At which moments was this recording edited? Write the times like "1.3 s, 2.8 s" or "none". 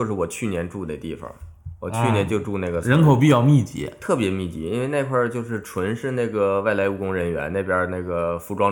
none